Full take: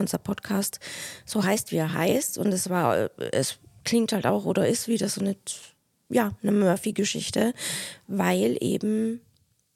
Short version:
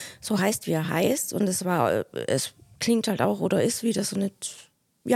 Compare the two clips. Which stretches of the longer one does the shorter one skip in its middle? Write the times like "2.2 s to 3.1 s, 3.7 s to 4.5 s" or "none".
none